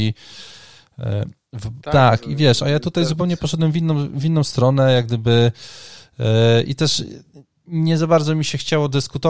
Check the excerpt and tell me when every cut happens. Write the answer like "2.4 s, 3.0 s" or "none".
1.8 s